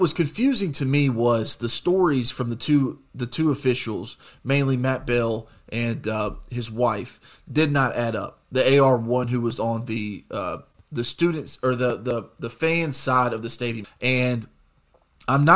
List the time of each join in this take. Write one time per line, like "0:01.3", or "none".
0:13.8